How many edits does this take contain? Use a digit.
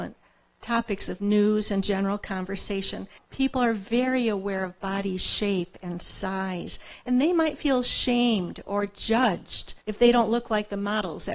2